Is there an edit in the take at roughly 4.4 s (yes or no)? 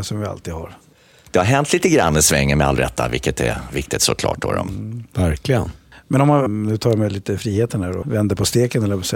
no